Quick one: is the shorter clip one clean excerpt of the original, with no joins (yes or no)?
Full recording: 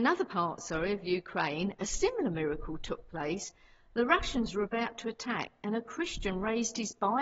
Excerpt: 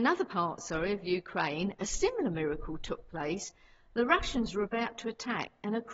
yes